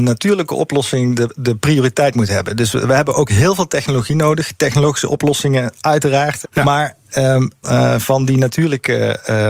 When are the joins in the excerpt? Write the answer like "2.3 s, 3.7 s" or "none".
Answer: 6.4 s, 7.6 s